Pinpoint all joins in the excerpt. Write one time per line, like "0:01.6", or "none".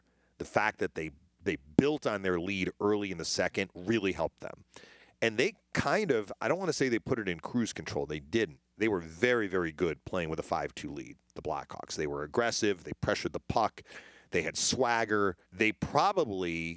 0:15.4

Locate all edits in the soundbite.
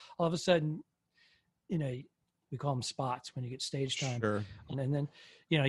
0:02.4
0:04.7

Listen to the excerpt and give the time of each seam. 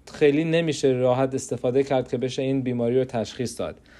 none

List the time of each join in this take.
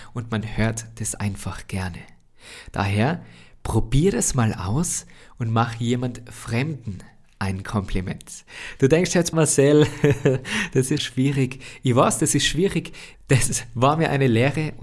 0:09.3
0:11.0
0:13.1

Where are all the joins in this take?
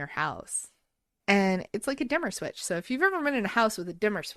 0:01.2

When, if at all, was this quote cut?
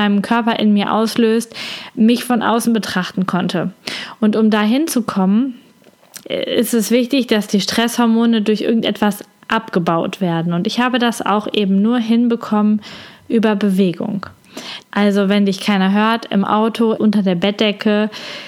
0:06.2
0:14.8
0:16.9

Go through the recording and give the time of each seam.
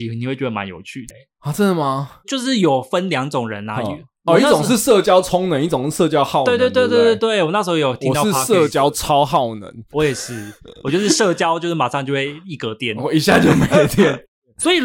0:01.1

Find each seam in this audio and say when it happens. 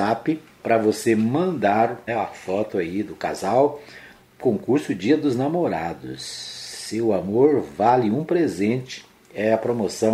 0:02.1

